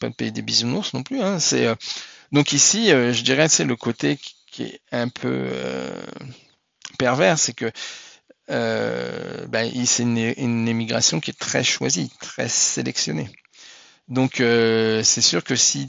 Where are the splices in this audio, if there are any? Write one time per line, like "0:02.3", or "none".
none